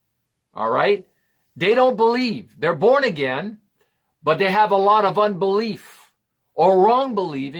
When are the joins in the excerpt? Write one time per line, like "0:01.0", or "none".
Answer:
none

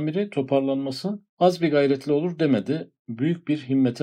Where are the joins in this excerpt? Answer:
0:01.3

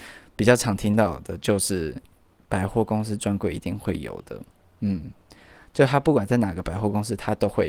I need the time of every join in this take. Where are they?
none

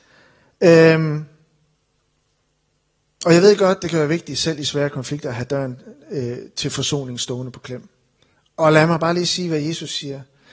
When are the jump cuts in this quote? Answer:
none

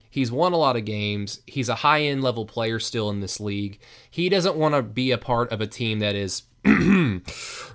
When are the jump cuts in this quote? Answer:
none

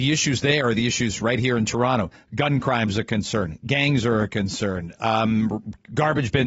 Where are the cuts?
none

